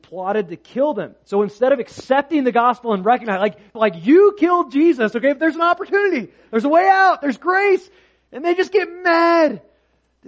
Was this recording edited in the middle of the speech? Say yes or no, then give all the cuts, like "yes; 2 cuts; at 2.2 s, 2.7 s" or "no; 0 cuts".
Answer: yes; 1 cut; at 3.7 s